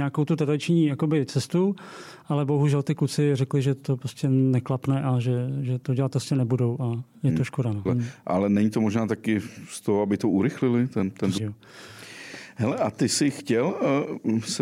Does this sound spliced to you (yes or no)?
yes